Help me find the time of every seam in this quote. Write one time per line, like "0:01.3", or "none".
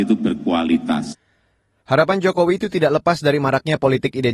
none